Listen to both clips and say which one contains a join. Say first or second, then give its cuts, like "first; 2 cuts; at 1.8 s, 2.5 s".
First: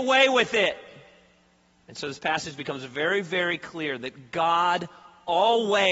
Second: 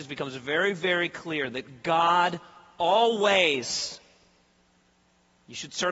first; 1 cut; at 1.7 s